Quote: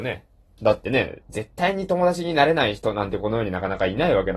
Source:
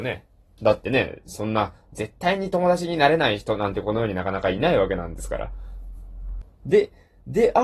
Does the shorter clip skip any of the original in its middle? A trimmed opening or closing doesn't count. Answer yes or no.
yes